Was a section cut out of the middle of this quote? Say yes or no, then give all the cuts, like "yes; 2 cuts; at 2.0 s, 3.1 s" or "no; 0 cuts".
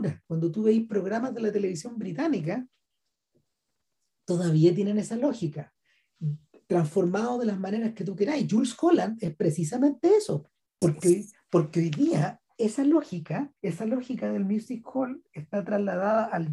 yes; 2 cuts; at 10.8 s, 13.6 s